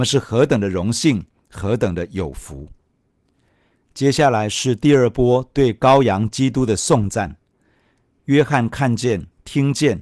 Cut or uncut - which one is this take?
uncut